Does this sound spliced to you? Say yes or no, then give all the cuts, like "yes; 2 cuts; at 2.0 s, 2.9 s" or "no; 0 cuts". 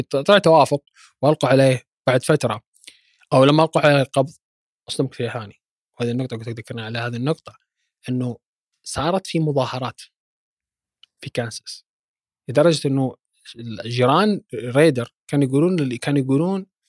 no; 0 cuts